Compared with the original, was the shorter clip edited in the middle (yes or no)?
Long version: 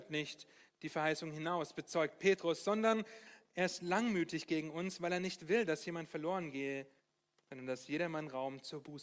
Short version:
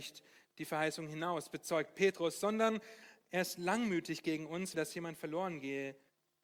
yes